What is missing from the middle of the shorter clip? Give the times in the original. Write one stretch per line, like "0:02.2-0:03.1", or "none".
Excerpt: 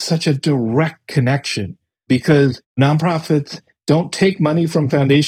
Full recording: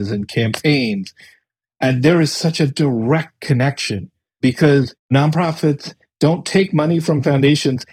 none